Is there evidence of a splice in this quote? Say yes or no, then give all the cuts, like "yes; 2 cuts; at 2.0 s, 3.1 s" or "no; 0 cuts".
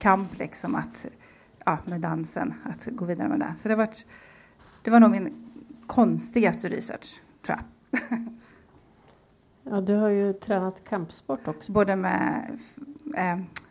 yes; 1 cut; at 11.7 s